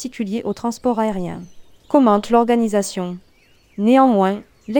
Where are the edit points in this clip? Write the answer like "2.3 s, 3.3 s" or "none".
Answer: 1.8 s